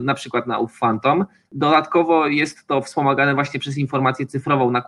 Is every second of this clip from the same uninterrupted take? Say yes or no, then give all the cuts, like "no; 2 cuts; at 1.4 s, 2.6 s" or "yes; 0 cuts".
no; 1 cut; at 1.4 s